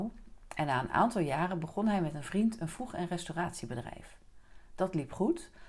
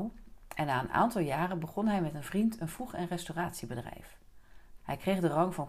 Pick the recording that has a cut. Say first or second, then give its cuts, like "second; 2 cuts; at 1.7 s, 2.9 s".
second; 1 cut; at 4.8 s